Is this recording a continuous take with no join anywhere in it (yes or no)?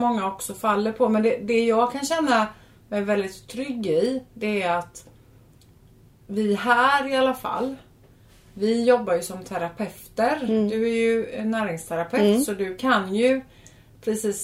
yes